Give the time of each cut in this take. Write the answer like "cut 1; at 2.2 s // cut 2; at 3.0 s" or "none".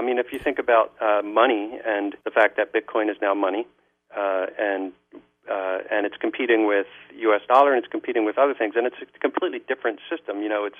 cut 1; at 2.2 s